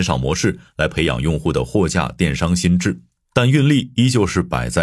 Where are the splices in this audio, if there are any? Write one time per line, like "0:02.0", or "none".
0:03.3